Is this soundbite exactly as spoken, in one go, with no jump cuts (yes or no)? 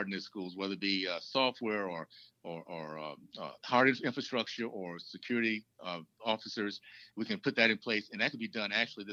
yes